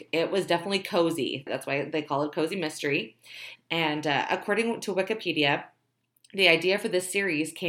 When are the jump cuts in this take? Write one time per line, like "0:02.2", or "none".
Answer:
0:01.5
0:03.6

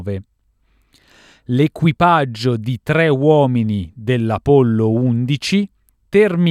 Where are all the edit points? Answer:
none

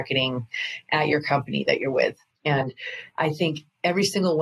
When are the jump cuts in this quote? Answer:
0:02.3

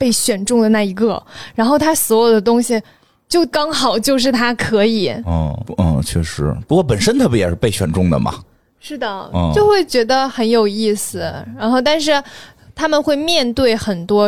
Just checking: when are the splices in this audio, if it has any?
0:03.5
0:05.6

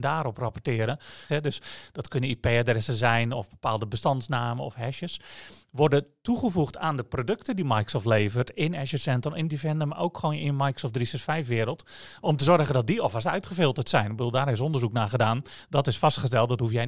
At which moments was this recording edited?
0:01.3

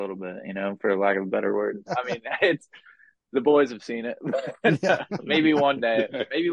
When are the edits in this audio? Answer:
0:01.9

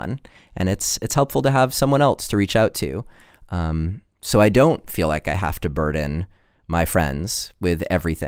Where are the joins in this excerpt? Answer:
none

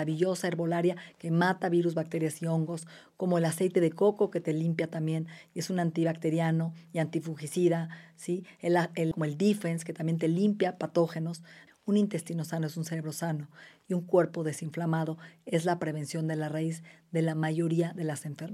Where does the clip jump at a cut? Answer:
0:09.1
0:11.7

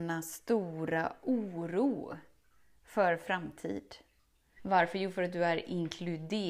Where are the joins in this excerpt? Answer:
0:04.6

